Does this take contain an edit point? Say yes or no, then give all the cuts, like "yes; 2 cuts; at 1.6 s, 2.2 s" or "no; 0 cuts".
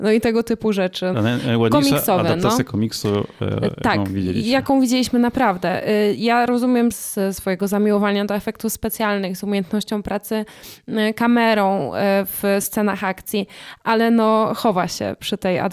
yes; 2 cuts; at 1.1 s, 6.9 s